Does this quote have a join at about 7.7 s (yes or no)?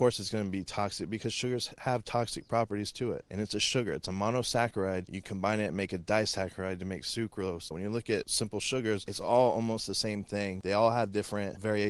yes